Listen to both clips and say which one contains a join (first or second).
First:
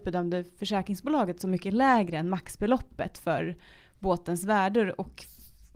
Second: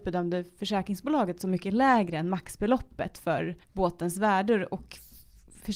second